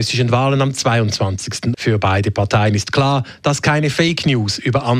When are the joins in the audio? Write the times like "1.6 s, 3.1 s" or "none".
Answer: 1.7 s